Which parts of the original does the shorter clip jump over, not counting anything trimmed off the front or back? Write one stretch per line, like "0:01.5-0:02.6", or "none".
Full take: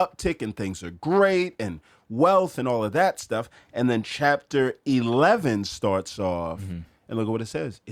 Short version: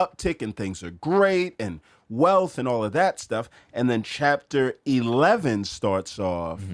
none